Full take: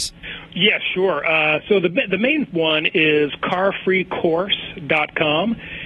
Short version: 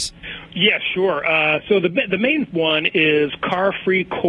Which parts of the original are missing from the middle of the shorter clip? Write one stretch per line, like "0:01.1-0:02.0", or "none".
none